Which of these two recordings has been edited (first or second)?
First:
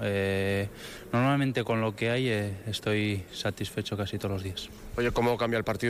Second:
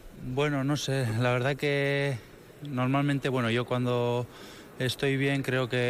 first